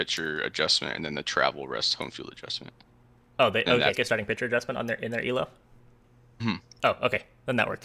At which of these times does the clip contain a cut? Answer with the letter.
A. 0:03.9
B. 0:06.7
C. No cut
A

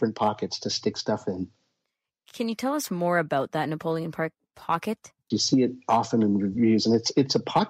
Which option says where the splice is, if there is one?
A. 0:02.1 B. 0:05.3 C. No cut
B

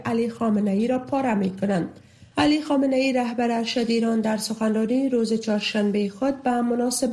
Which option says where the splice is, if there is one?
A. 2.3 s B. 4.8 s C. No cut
A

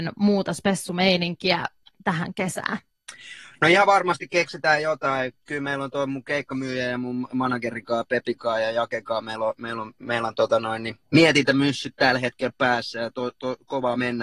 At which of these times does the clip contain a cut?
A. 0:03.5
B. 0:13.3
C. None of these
C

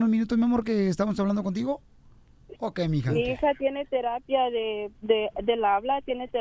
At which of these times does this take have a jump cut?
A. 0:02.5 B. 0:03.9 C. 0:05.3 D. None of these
A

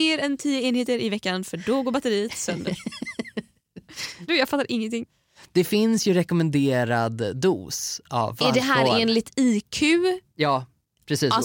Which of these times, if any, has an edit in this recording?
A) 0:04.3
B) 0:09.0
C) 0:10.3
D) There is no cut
A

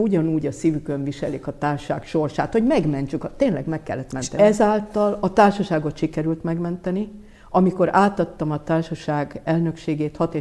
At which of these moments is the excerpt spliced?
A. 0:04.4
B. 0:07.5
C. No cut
A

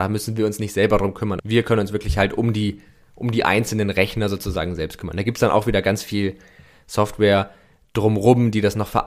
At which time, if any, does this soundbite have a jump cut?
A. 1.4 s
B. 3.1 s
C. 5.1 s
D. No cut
A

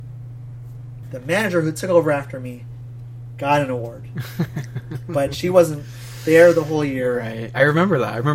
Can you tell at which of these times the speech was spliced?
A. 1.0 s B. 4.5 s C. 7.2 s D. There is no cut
A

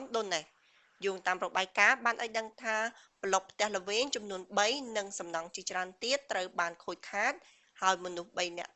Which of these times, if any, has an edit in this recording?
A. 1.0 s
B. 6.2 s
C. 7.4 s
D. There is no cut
D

